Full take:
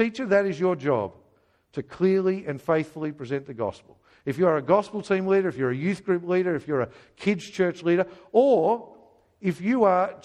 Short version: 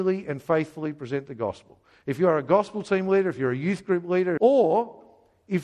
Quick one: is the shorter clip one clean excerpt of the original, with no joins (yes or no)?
no